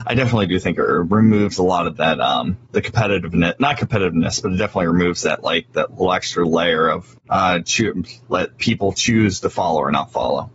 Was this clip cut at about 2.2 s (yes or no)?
no